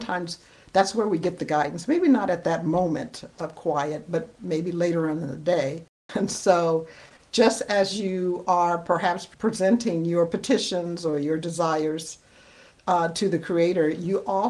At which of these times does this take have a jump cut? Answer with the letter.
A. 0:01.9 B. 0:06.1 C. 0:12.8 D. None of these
B